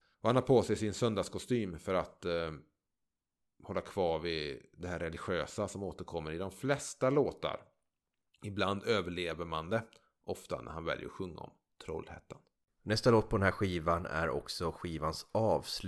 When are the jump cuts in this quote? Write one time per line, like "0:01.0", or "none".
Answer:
none